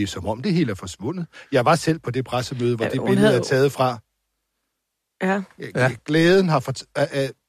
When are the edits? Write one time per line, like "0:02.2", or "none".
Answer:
0:06.0